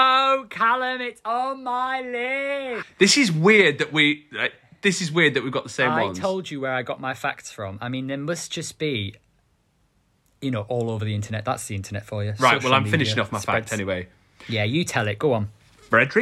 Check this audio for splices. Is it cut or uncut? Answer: cut